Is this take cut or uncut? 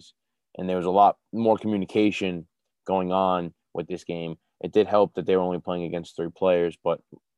uncut